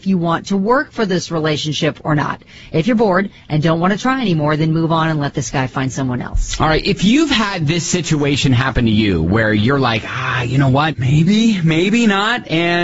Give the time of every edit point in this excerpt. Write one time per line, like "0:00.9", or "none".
none